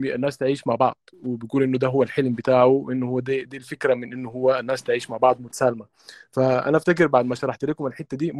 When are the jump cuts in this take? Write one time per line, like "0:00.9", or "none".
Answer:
0:03.5

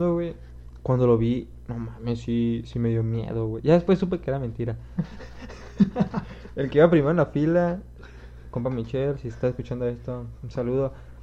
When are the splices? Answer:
0:05.0

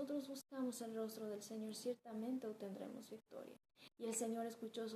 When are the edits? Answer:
0:03.9

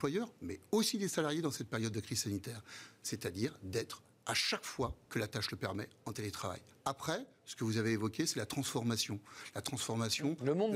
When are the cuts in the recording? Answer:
none

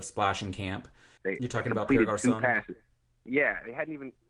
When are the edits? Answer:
0:01.2

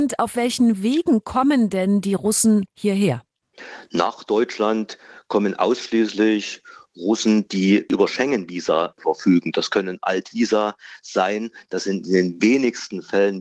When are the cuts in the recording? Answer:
none

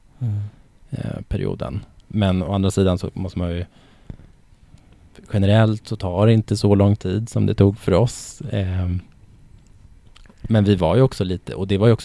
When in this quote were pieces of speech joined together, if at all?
0:02.1

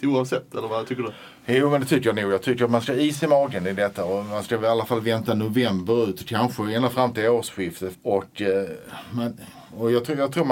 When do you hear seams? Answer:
0:07.9

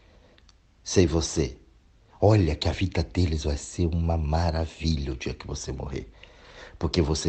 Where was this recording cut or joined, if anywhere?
none

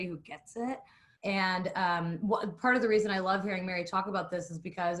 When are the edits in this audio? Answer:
0:01.2

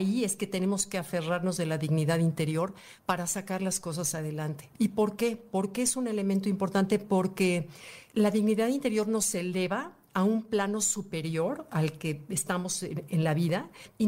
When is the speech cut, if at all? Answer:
none

